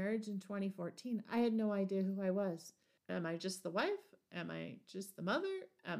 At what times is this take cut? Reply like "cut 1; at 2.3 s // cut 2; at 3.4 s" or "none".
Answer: cut 1; at 3.0 s